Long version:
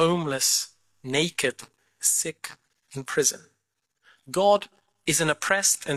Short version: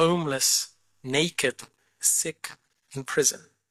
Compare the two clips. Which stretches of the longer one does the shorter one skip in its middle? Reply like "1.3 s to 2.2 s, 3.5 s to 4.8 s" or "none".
none